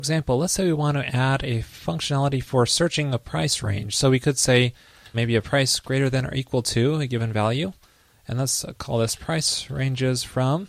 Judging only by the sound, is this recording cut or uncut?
cut